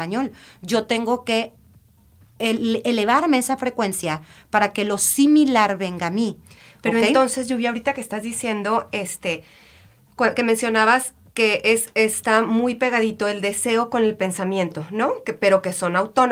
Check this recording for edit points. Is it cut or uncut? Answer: uncut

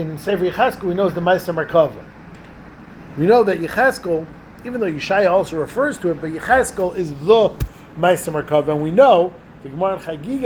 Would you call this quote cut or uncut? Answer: uncut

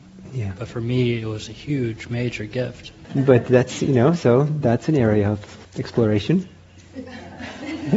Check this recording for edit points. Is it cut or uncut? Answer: cut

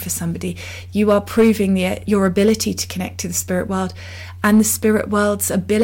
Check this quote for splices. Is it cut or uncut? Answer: cut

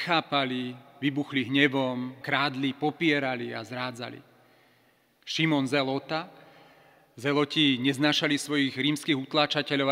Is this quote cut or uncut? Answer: cut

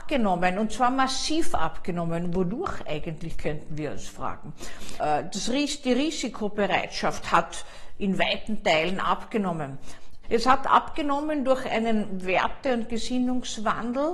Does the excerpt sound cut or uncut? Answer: cut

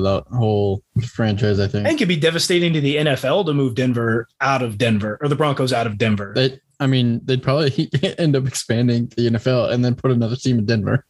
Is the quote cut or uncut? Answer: uncut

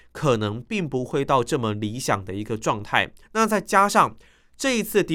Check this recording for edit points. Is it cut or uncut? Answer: cut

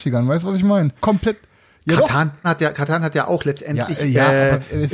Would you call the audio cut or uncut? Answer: cut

